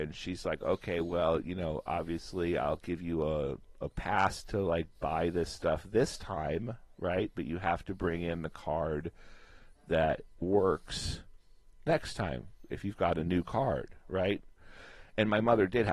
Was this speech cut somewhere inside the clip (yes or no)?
no